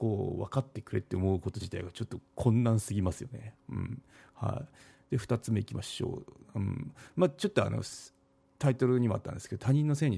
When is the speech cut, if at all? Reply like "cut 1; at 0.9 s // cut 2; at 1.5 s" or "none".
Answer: none